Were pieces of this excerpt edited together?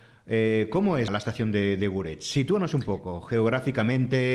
yes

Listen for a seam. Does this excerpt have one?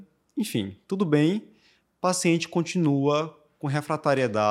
no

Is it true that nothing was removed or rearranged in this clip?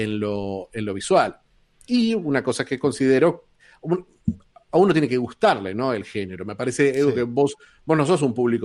yes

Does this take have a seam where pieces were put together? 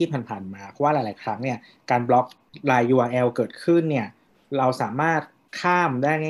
no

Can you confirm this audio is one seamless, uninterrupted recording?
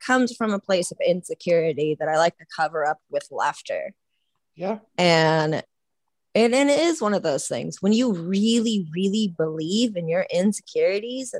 yes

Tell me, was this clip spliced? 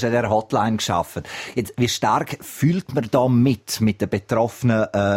no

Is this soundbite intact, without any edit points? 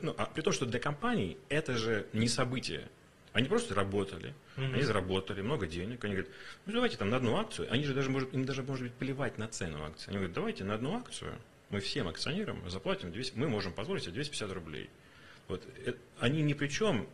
yes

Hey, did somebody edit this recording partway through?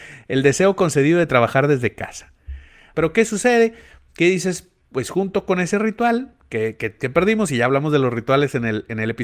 yes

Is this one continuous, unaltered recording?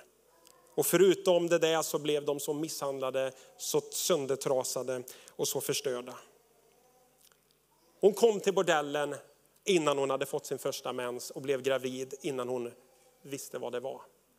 yes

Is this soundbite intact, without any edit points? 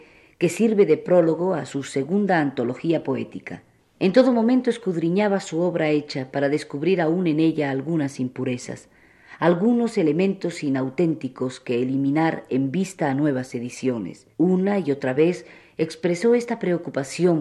no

